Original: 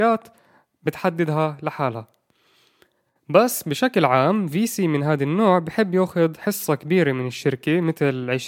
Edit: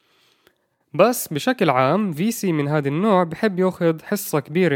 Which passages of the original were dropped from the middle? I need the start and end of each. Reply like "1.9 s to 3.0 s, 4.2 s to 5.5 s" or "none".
none